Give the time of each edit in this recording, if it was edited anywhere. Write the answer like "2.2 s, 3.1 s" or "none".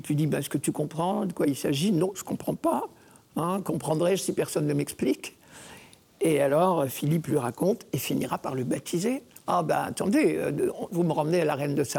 9.5 s, 10.9 s

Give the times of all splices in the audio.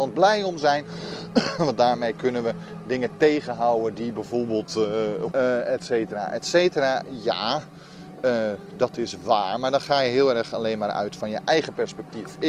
5.3 s

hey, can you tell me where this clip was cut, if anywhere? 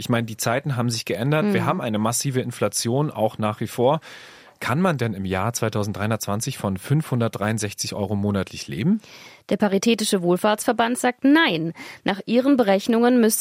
none

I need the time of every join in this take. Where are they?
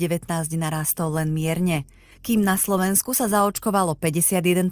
2.1 s

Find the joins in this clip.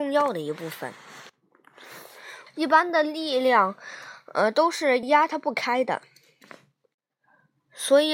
2.5 s, 5.0 s

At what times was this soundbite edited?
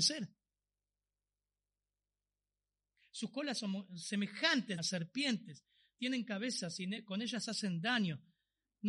4.8 s

